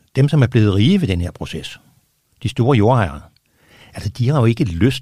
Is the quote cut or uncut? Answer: uncut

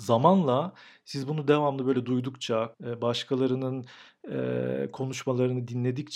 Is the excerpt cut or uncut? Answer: cut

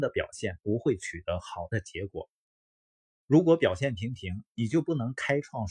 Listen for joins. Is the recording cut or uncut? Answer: uncut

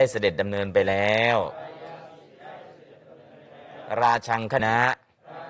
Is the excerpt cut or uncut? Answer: cut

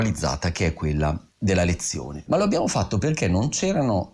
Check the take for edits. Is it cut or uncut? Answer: cut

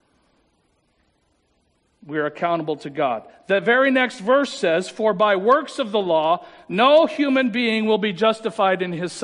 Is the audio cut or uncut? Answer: uncut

